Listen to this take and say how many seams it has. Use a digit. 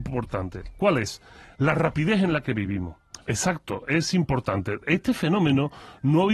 1